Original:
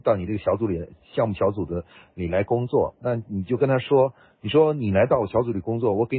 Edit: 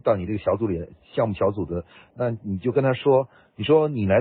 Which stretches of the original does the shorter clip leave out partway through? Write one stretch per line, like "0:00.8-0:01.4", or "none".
0:02.1-0:03.0

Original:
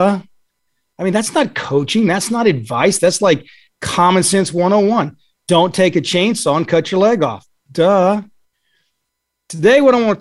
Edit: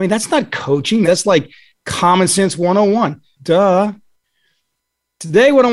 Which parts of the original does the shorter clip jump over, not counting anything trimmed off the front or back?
0:02.1-0:03.0
0:05.3-0:07.6

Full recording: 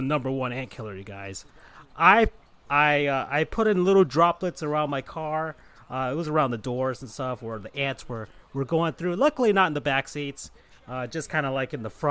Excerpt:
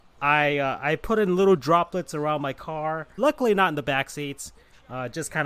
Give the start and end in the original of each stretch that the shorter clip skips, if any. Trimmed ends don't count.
0:05.7-0:09.2

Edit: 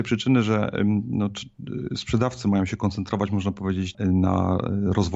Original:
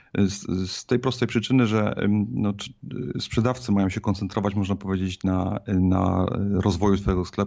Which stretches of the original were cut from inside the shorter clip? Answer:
0:05.2-0:05.6

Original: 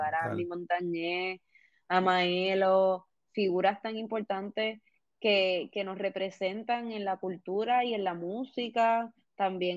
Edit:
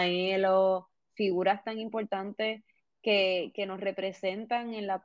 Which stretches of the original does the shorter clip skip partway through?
none

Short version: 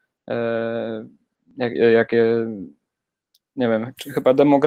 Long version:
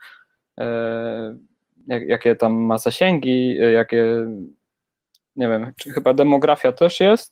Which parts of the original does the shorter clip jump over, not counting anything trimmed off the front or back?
0:02.1-0:03.6

